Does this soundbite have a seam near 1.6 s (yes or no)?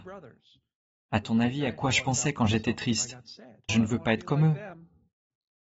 no